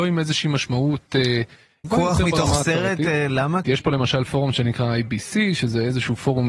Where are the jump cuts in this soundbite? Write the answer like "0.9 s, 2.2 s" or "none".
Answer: 1.8 s, 3.6 s